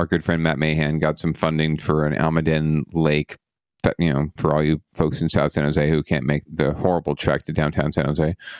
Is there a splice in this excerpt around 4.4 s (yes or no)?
yes